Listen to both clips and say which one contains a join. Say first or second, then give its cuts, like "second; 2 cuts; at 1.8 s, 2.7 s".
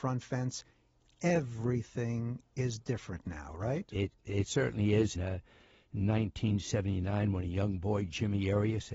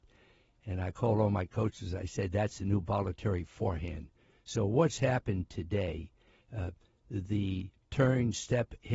first; 1 cut; at 5.1 s